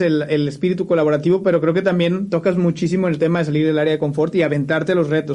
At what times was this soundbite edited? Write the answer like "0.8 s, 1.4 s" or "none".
none